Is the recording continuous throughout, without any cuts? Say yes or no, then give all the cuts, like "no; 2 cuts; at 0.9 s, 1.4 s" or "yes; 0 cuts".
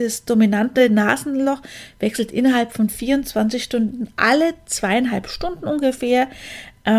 yes; 0 cuts